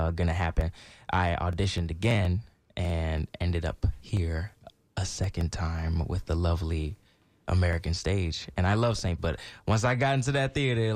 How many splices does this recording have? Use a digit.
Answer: 1